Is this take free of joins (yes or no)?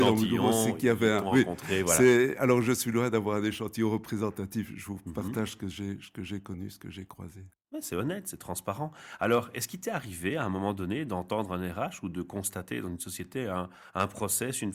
yes